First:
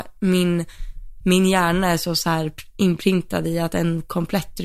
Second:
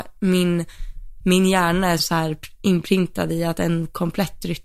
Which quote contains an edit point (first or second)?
second